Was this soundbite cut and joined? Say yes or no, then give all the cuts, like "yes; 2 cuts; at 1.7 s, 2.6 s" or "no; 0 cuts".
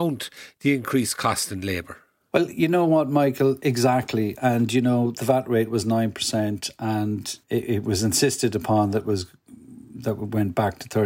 no; 0 cuts